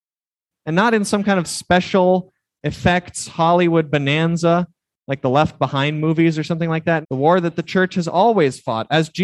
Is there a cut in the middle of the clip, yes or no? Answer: yes